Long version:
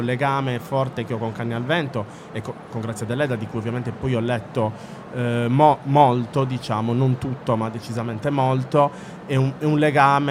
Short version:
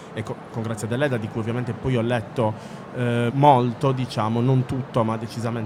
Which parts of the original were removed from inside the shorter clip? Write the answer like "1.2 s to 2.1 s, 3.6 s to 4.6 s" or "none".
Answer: 5.5 s to 5.8 s